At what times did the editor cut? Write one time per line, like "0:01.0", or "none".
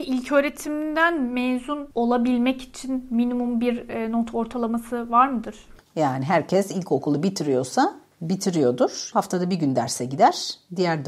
0:05.8
0:09.1